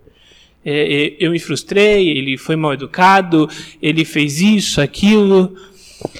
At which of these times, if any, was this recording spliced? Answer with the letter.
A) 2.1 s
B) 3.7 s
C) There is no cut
A